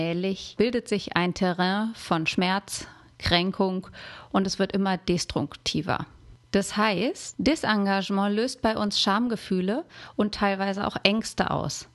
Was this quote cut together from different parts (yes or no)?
no